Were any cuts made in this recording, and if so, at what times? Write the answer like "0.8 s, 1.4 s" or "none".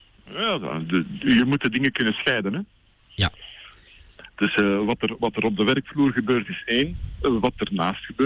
none